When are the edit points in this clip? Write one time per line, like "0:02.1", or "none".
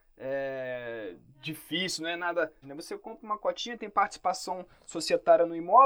0:02.6